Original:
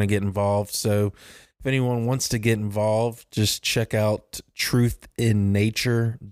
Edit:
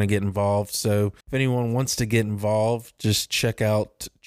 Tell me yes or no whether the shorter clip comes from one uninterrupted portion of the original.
no